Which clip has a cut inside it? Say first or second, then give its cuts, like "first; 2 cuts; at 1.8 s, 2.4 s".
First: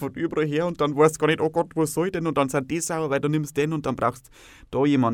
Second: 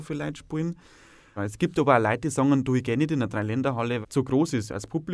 second; 2 cuts; at 1.4 s, 4.0 s